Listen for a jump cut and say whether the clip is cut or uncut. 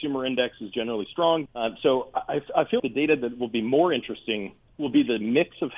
cut